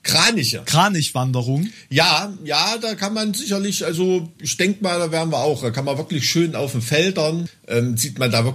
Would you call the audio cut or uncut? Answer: uncut